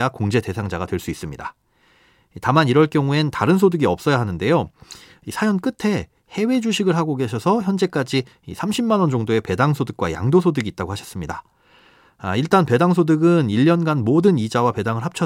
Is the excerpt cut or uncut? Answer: uncut